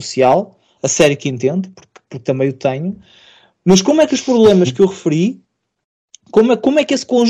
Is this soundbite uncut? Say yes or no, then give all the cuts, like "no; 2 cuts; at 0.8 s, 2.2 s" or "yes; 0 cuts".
yes; 0 cuts